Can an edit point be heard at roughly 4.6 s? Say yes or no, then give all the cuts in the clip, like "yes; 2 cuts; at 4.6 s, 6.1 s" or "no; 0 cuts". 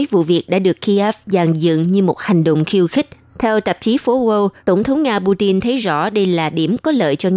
yes; 2 cuts; at 3.3 s, 4.6 s